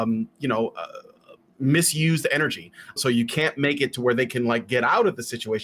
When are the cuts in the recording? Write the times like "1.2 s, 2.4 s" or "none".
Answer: 3.0 s